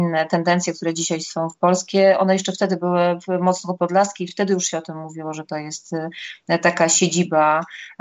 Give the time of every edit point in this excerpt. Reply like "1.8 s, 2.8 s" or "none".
none